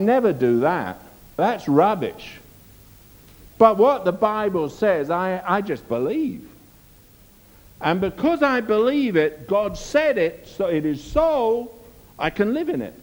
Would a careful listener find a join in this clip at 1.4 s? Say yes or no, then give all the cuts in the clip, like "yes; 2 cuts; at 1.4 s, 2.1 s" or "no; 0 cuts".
yes; 1 cut; at 1.4 s